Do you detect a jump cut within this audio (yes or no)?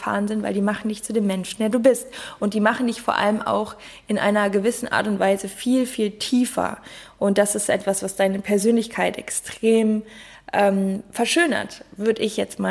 no